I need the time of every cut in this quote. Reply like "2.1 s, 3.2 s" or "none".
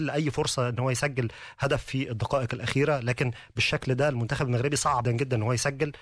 5.0 s